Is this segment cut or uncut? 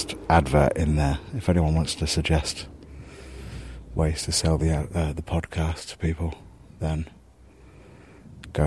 uncut